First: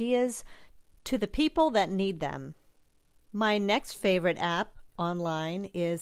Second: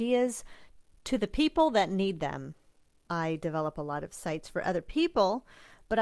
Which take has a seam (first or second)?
second